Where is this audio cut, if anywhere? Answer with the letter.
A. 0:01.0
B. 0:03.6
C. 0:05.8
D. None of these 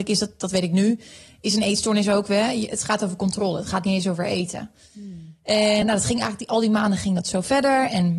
C